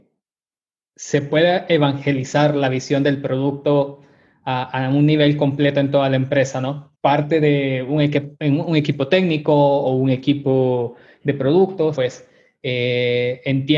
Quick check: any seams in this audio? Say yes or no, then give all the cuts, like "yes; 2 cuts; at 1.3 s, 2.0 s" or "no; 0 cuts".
yes; 2 cuts; at 6.9 s, 12.0 s